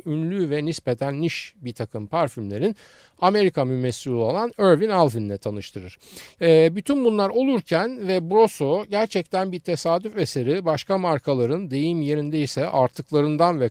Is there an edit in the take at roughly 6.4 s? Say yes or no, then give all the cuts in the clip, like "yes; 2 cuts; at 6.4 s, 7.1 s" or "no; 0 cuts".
yes; 1 cut; at 6.4 s